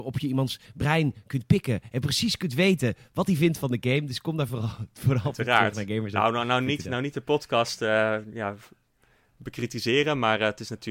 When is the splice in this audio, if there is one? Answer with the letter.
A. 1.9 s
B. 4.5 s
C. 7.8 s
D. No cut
D